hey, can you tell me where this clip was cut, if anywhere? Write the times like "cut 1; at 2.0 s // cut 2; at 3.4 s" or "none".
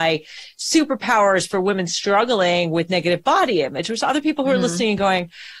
none